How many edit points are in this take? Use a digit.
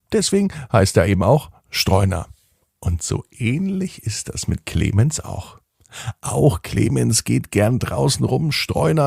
0